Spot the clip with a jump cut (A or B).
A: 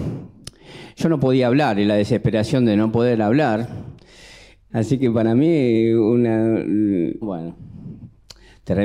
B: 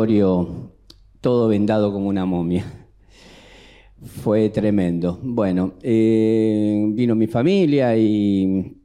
A